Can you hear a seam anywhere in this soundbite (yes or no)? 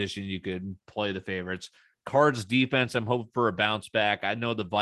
no